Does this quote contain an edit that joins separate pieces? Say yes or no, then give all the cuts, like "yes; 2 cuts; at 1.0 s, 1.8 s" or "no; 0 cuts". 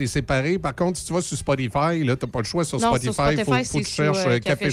no; 0 cuts